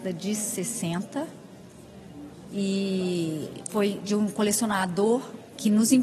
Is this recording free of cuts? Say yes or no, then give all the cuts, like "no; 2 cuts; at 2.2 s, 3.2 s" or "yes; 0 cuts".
yes; 0 cuts